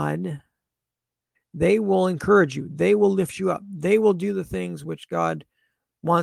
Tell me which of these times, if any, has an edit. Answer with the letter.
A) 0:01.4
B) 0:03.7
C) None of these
A